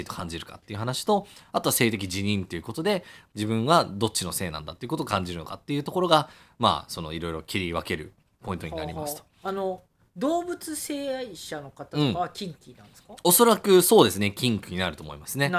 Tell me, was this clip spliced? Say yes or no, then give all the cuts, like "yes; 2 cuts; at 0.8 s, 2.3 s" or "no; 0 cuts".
no; 0 cuts